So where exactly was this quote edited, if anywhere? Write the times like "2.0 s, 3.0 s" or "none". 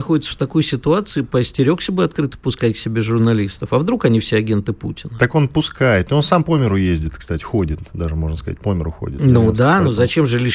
none